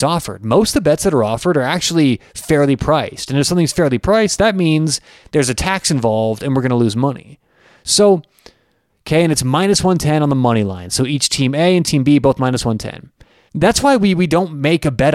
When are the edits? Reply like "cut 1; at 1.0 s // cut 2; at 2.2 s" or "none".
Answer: cut 1; at 8.9 s // cut 2; at 13.5 s